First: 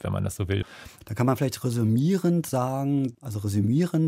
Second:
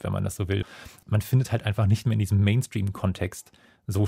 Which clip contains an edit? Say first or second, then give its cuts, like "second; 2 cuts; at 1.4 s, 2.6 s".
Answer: first; 1 cut; at 1.0 s